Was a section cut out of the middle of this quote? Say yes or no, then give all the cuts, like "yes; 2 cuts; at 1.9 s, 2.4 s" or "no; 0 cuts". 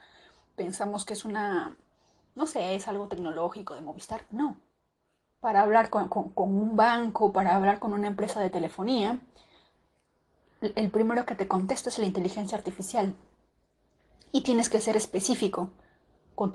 yes; 1 cut; at 5.4 s